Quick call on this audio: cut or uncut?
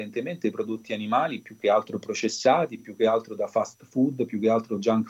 uncut